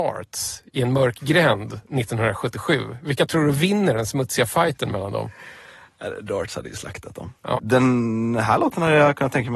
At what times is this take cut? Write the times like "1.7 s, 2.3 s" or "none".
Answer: 7.5 s